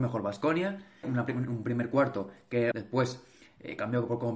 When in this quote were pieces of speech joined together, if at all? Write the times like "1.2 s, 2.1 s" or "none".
1.0 s, 2.7 s